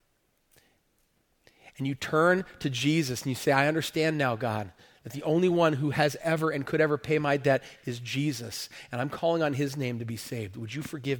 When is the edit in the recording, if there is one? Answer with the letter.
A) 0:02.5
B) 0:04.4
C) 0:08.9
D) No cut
D